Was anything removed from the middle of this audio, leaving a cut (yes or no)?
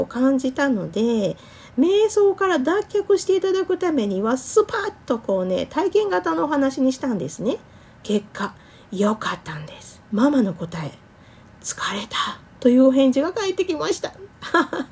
yes